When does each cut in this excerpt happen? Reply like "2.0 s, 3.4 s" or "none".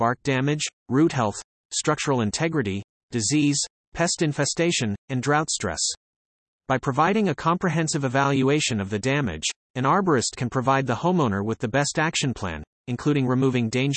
none